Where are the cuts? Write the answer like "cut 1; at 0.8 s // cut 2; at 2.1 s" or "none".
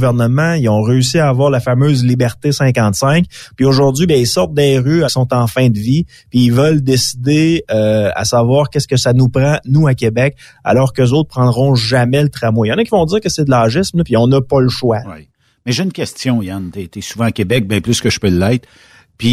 cut 1; at 5.1 s // cut 2; at 15.0 s